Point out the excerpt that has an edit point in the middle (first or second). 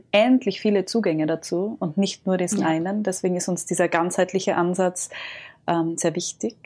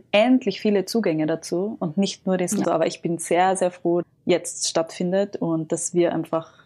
second